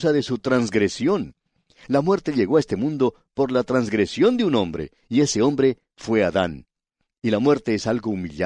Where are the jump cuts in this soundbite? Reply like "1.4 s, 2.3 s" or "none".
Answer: none

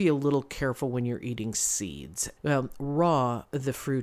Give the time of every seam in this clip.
2.4 s

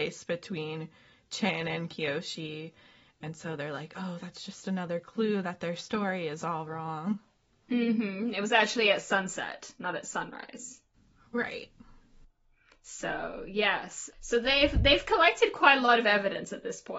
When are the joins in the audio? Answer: none

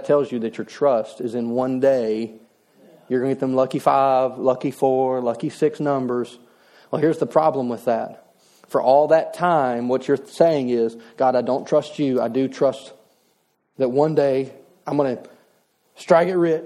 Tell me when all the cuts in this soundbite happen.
none

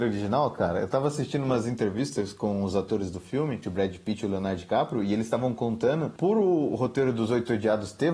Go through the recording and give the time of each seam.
3.6 s

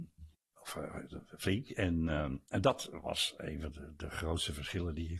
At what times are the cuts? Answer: 3.7 s

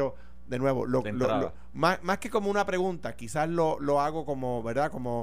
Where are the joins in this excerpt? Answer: none

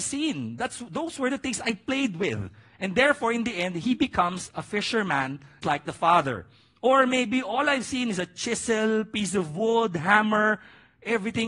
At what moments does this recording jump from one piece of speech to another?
5.6 s

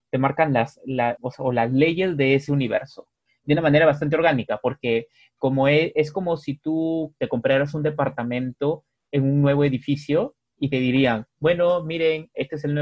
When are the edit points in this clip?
1.2 s

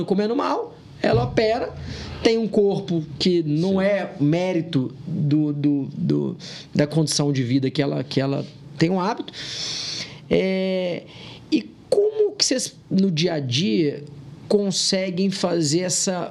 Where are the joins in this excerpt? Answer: none

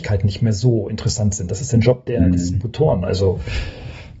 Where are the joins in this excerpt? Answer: 3.0 s

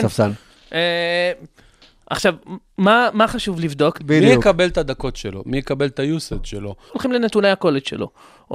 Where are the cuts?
4.0 s, 6.9 s

